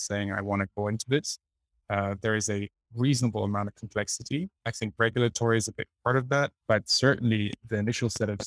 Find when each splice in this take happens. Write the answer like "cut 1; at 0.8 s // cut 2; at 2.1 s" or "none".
cut 1; at 6.6 s

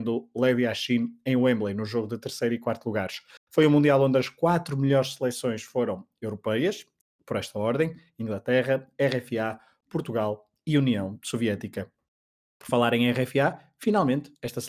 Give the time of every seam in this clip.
none

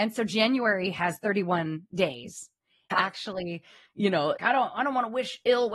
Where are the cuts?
cut 1; at 2.9 s // cut 2; at 4.4 s

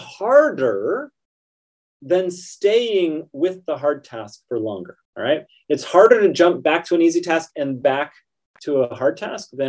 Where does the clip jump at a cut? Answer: cut 1; at 5.1 s // cut 2; at 7.8 s

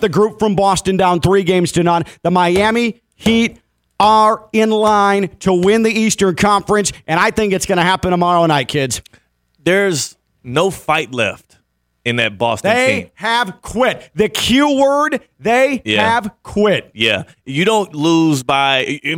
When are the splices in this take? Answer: none

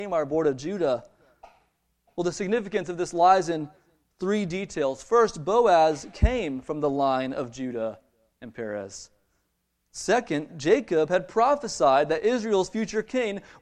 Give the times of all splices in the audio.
none

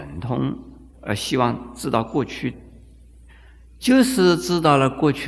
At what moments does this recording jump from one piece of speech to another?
cut 1; at 2.5 s

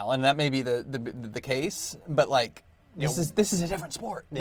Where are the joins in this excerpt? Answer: none

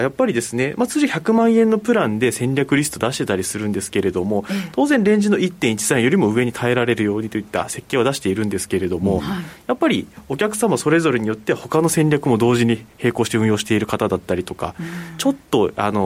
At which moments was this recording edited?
none

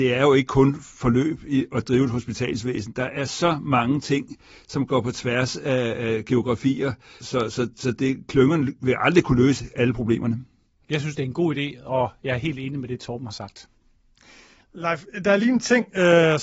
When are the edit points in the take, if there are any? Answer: cut 1; at 7.2 s // cut 2; at 10.8 s

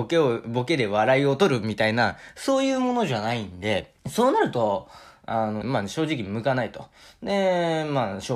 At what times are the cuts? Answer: cut 1; at 4.0 s // cut 2; at 5.6 s

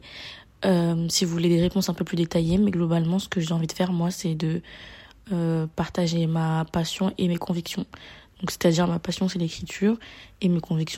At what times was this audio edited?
none

